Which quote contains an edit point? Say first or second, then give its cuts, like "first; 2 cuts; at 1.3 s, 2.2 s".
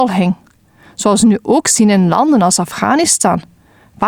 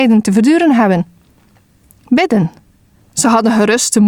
second; 1 cut; at 3.0 s